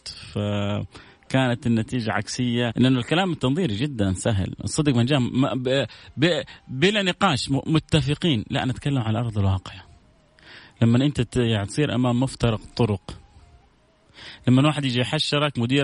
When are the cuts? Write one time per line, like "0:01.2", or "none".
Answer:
0:02.7